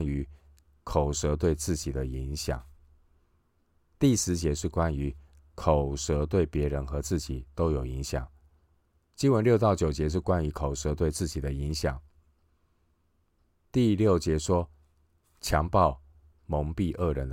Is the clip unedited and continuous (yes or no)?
no